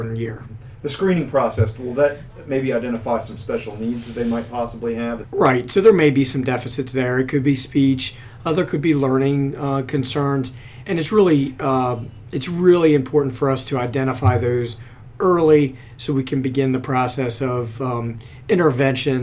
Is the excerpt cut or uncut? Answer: cut